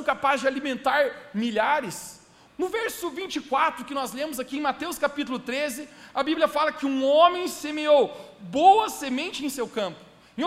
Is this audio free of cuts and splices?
no; 1 cut; at 2.5 s

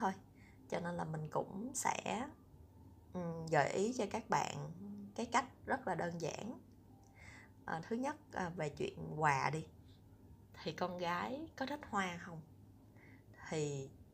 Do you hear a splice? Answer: no; 0 cuts

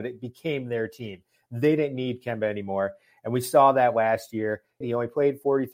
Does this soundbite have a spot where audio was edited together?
yes; 1 cut; at 4.8 s

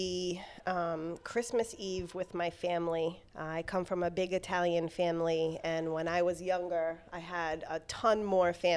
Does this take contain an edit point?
yes; 1 cut; at 3.3 s

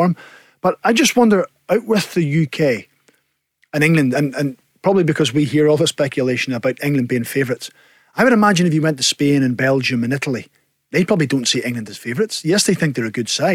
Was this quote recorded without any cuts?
yes; 0 cuts

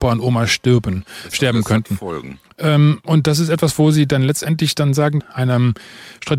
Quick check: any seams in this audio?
yes; 2 cuts; at 2.5 s, 5.2 s

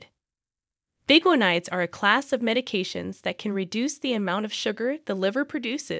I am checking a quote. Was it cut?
no; 0 cuts

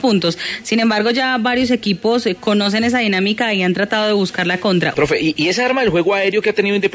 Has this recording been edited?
yes; 1 cut; at 4.9 s

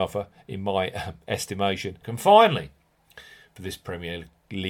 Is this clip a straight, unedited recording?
no; 1 cut; at 2.0 s

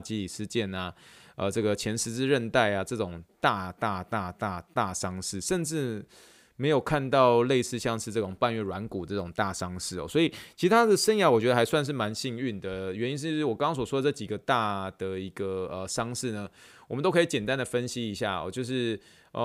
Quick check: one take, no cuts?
yes; 0 cuts

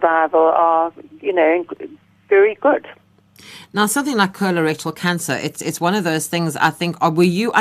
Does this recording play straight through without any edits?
yes; 0 cuts

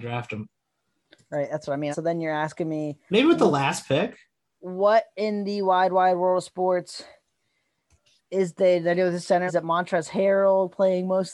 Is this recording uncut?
no; 2 cuts; at 1.9 s, 9.5 s

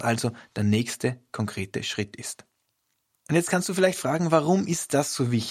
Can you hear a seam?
no; 0 cuts

